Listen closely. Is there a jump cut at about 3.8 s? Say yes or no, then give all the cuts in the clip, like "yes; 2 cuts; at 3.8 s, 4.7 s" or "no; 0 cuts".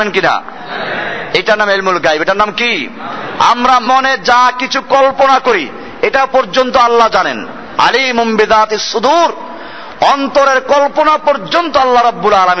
yes; 1 cut; at 3.8 s